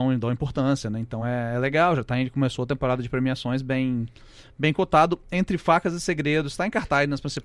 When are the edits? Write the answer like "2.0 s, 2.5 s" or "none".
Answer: none